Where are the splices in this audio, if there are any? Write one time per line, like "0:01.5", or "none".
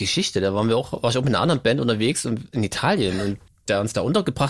0:03.5